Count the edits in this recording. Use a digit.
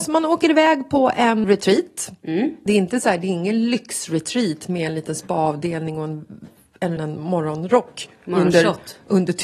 3